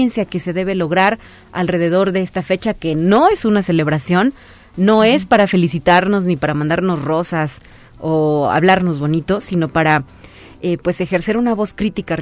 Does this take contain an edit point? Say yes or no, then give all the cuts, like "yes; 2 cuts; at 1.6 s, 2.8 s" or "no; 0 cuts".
no; 0 cuts